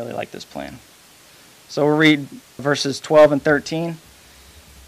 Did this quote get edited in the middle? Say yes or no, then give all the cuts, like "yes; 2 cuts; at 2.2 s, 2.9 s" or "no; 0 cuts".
yes; 1 cut; at 2.6 s